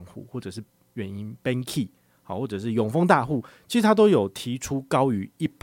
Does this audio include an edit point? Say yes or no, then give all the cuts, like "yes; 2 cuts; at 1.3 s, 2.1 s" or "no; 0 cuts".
no; 0 cuts